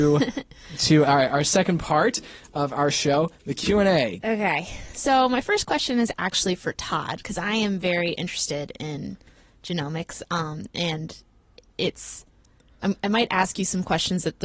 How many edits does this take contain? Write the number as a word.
one